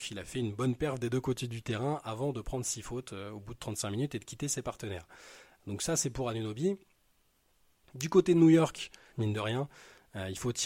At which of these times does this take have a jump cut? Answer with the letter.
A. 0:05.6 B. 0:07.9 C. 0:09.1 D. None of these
C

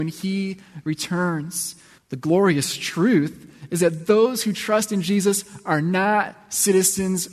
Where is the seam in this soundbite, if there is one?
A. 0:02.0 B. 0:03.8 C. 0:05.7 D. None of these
A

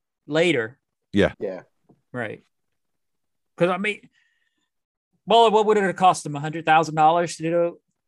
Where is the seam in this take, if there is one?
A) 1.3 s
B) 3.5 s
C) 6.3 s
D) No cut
A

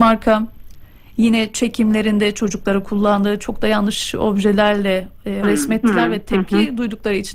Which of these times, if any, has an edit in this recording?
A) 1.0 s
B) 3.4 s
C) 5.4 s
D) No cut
C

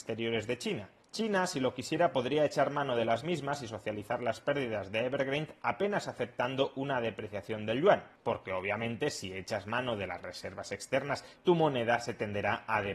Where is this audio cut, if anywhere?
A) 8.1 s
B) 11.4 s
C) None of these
B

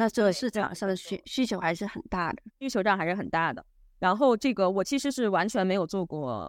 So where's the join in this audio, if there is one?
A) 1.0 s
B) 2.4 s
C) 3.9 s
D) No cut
D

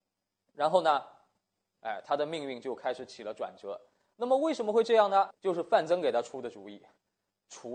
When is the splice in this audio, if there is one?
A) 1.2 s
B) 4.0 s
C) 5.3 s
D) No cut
C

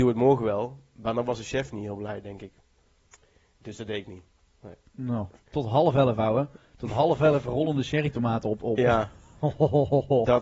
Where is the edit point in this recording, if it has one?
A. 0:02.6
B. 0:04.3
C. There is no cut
C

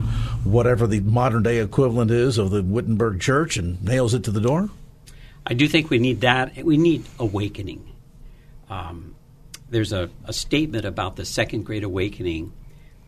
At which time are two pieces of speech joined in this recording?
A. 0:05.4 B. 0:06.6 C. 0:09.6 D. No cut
D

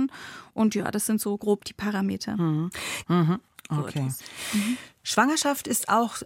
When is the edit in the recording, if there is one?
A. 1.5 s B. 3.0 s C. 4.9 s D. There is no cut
B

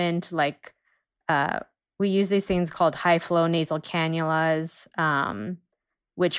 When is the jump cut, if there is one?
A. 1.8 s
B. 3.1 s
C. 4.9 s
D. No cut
D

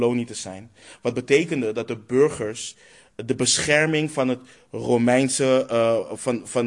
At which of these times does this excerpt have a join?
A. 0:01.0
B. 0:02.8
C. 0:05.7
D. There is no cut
D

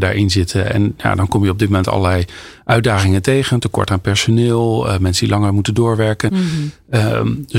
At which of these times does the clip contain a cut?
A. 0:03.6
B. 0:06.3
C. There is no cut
B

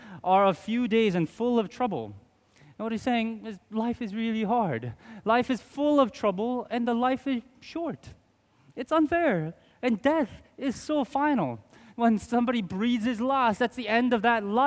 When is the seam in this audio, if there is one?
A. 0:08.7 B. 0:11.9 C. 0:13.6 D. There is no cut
B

